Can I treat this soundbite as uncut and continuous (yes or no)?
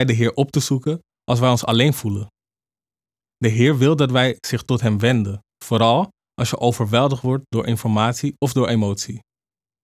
no